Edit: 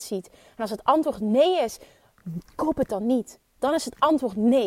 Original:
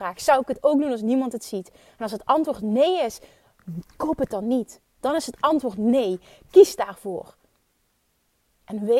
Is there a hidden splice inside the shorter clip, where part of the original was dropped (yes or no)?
no